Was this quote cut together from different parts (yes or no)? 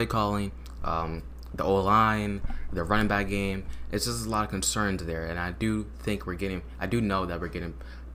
no